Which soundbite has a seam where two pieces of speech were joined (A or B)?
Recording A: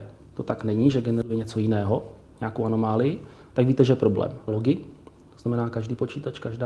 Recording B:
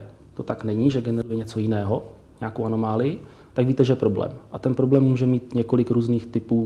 A